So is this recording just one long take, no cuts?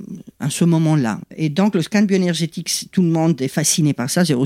no; 1 cut; at 1.2 s

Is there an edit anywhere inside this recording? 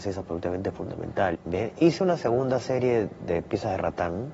yes; 1 cut; at 1.3 s

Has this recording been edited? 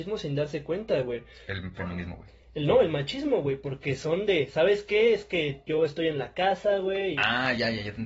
no; 0 cuts

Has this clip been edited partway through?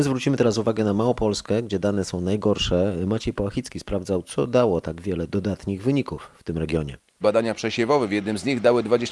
yes; 1 cut; at 7.2 s

